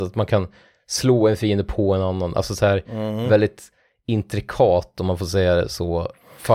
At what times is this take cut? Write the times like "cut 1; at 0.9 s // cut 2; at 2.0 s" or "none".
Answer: none